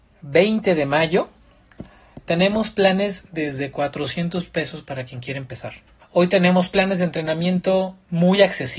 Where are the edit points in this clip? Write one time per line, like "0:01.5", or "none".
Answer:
0:06.0